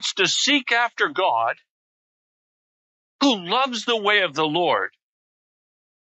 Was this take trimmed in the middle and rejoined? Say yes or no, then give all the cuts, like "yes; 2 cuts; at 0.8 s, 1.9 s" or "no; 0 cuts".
no; 0 cuts